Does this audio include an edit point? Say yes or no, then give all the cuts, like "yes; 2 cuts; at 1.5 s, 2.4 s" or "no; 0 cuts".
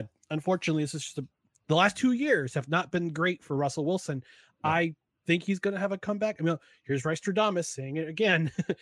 no; 0 cuts